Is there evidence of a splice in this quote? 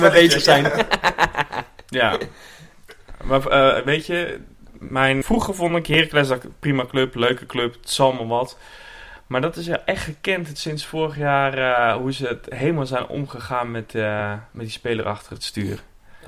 yes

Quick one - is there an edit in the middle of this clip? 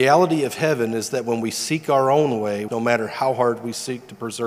yes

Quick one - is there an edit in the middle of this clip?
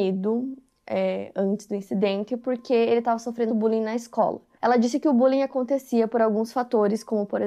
yes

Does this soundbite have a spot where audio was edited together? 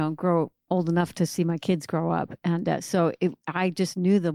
no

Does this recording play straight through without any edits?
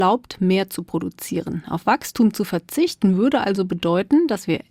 yes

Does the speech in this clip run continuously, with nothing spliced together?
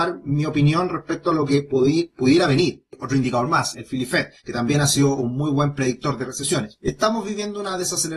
no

